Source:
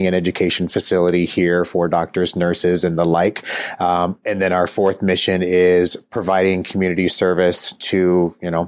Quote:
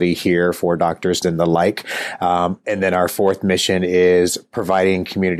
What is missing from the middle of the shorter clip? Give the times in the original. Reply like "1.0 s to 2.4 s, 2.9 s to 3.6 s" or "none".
2.3 s to 2.8 s